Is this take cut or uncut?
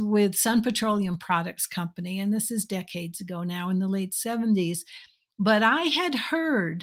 uncut